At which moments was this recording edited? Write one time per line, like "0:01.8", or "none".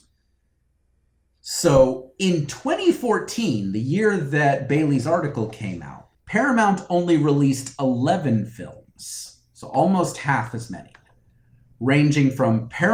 0:06.1